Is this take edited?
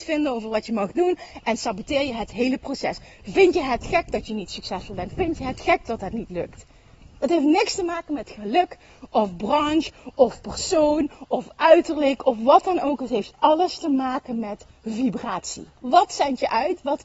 yes; 1 cut; at 15.8 s

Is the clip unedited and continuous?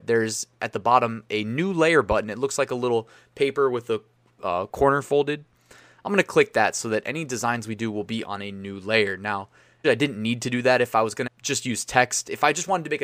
no; 2 cuts; at 9.8 s, 11.3 s

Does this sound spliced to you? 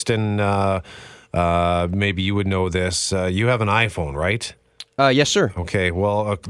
no; 0 cuts

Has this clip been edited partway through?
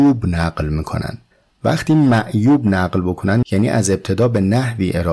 no; 0 cuts

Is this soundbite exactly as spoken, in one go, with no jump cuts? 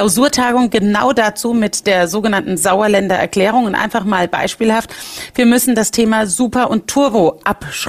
yes; 0 cuts

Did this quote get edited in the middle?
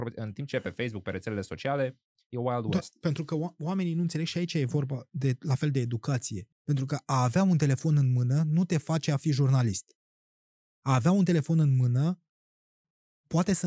yes; 1 cut; at 6.5 s

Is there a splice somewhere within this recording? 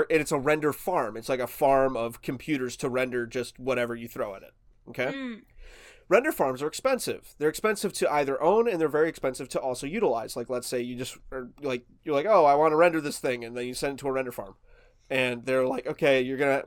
no; 0 cuts

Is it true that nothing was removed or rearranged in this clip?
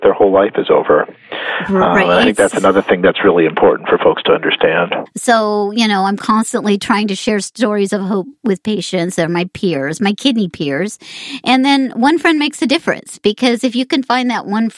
no; 1 cut; at 5.1 s

